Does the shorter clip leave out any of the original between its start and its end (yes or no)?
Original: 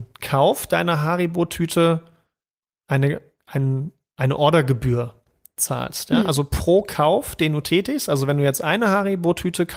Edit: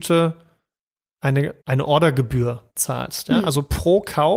yes